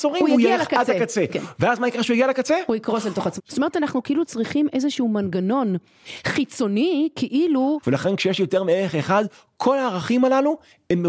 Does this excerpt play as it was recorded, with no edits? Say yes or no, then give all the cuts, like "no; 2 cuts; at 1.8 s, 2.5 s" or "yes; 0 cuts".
no; 2 cuts; at 3.4 s, 7.8 s